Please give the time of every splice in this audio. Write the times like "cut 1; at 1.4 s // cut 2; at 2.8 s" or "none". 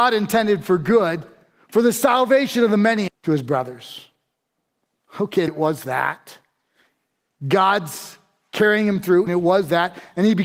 cut 1; at 3.1 s // cut 2; at 5.5 s // cut 3; at 9.3 s